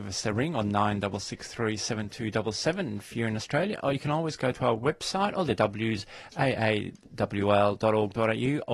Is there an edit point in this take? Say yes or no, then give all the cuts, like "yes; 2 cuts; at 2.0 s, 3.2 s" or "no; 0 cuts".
no; 0 cuts